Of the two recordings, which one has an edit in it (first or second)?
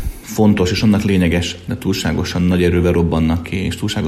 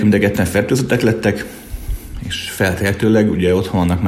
first